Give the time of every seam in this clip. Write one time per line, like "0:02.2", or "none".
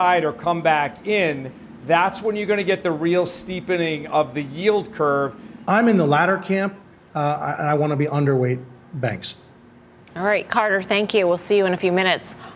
0:05.6